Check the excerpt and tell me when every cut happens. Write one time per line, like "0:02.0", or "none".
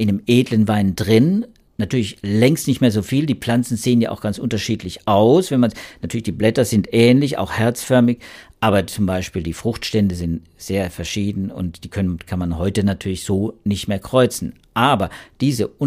none